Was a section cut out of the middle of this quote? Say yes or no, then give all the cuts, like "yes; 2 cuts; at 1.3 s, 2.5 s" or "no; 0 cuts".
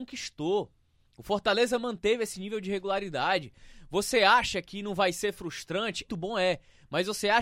yes; 1 cut; at 6.1 s